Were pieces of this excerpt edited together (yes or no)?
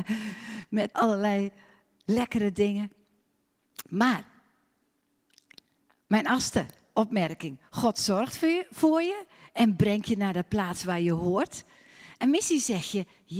yes